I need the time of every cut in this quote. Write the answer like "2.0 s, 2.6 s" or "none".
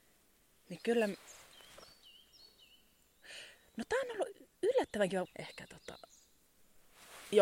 5.2 s